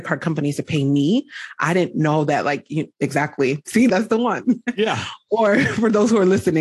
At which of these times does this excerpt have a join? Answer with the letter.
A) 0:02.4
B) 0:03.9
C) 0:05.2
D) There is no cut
B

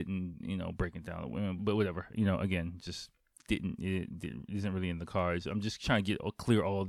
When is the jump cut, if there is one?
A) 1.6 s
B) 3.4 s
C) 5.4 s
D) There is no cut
A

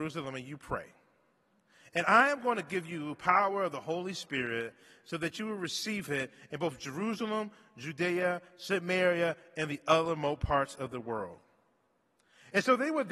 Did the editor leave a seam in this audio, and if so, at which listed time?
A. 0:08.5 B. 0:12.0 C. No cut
C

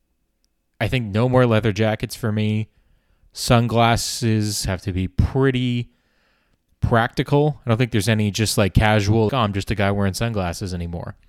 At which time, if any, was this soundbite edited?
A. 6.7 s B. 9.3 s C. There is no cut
B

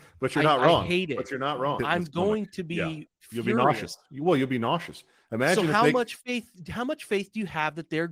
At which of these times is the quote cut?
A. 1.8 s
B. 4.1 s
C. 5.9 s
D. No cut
A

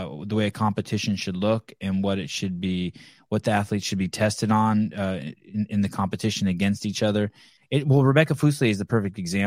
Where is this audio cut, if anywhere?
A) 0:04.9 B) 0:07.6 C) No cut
B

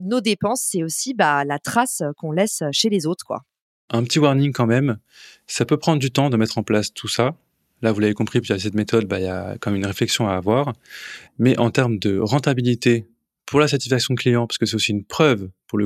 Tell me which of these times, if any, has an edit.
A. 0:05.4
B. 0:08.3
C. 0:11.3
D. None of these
C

